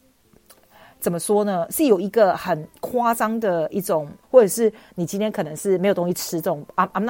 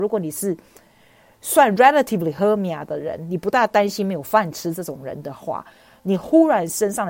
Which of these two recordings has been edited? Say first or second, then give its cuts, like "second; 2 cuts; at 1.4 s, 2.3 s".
first; 1 cut; at 4.2 s